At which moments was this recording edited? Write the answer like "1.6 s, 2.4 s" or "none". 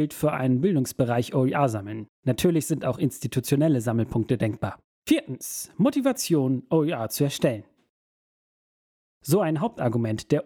4.9 s, 9.2 s